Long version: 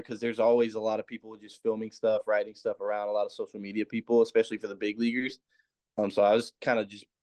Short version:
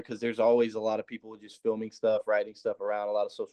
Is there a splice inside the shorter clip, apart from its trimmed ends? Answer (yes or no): no